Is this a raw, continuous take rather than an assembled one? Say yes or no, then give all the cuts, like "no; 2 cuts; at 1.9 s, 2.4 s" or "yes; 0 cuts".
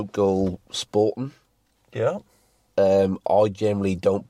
yes; 0 cuts